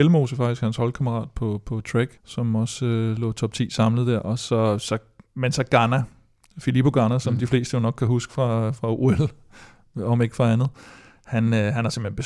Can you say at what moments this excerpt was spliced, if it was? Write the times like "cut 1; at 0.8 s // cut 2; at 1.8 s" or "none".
cut 1; at 2.2 s